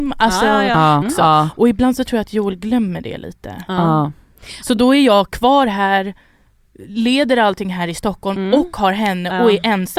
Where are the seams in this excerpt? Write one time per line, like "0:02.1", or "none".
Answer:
0:01.0

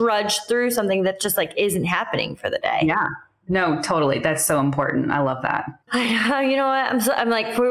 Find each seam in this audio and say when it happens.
0:05.8

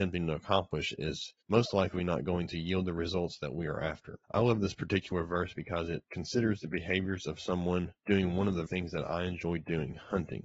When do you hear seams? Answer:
0:04.2
0:08.7

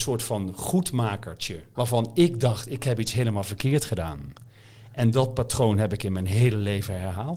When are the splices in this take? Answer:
0:01.8

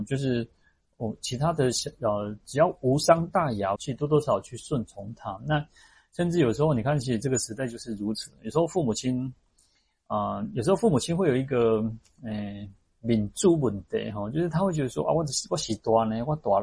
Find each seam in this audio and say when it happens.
0:03.8

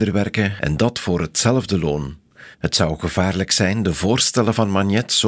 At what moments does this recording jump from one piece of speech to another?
0:02.5

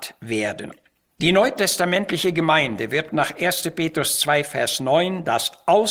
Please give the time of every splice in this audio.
none

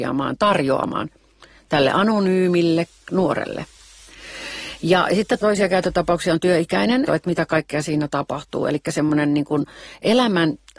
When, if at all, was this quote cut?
0:05.4
0:07.1

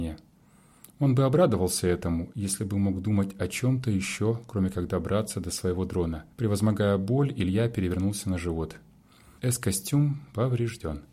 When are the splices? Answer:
0:06.3
0:09.4

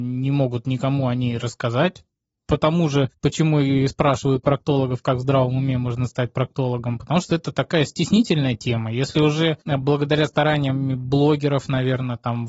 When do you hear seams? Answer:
0:09.6

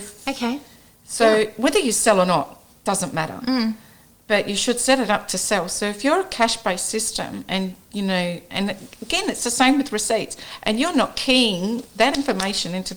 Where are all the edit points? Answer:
none

